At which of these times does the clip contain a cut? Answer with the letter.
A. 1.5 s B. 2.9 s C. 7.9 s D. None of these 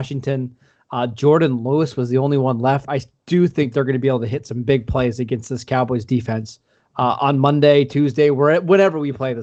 B